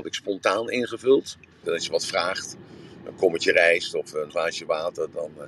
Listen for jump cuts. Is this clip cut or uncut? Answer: cut